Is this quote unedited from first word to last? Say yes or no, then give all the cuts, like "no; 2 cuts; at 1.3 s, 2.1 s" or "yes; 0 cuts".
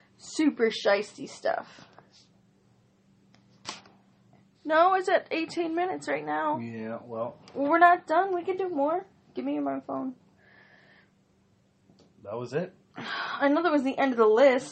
no; 1 cut; at 4.5 s